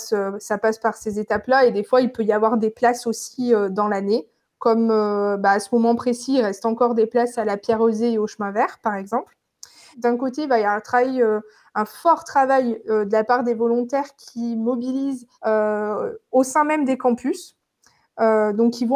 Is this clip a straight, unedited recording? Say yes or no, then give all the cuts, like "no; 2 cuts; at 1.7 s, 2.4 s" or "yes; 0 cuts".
no; 2 cuts; at 9.9 s, 15.3 s